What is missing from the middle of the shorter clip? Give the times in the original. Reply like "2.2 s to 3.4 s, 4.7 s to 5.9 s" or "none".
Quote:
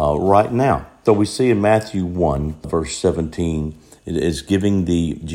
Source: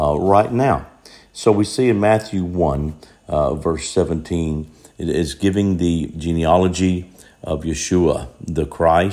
1.1 s to 1.5 s, 3.0 s to 3.6 s